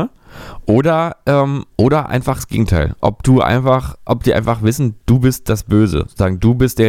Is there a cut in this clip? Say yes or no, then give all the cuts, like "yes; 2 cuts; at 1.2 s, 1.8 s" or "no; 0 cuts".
no; 0 cuts